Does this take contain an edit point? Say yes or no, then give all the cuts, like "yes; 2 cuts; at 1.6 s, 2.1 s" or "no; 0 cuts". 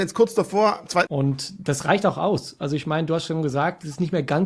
yes; 1 cut; at 1.1 s